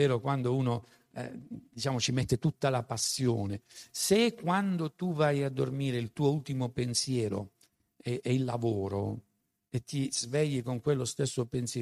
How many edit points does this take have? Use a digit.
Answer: 0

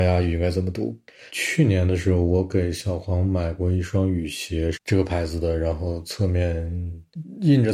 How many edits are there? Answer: 2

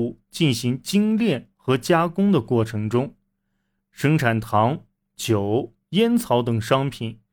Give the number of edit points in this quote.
0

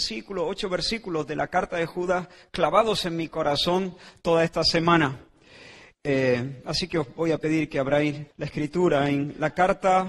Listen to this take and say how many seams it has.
2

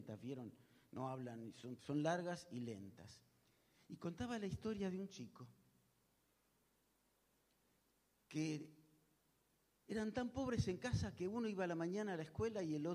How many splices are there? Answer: 1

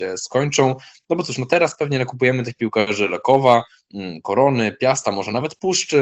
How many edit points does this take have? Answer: 0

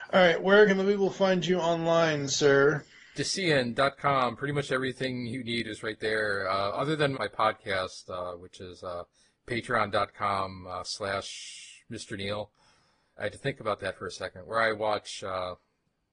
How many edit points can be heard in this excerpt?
1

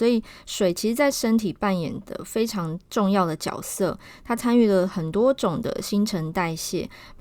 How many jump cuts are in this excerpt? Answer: 0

